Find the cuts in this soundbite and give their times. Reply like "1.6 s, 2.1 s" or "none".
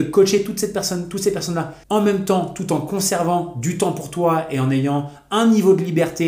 1.8 s